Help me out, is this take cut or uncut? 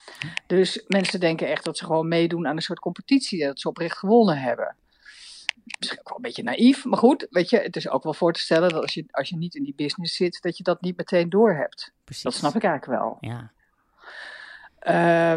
uncut